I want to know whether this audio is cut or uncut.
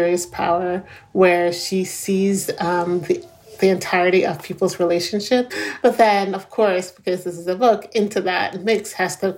cut